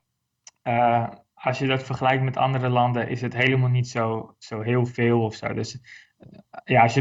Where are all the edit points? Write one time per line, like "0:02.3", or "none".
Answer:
none